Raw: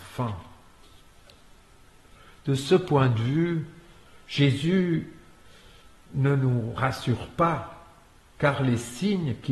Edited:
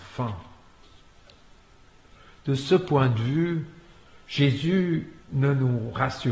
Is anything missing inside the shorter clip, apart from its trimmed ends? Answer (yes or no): yes